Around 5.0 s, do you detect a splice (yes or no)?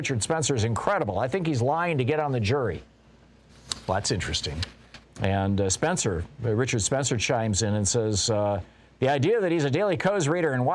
yes